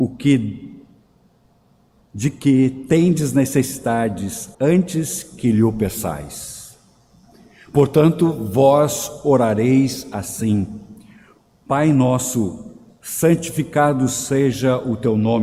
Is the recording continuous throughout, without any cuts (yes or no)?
no